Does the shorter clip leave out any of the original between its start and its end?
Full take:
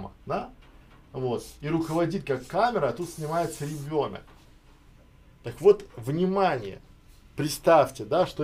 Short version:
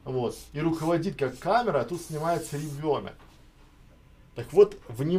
no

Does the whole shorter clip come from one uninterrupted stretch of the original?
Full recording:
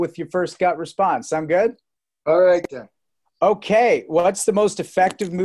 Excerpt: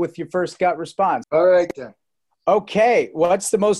no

